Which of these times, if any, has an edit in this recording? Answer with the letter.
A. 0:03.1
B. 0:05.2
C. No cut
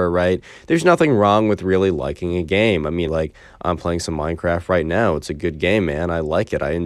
A